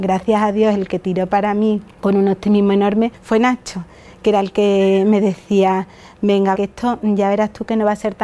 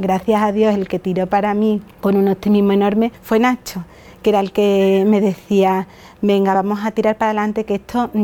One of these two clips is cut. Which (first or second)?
first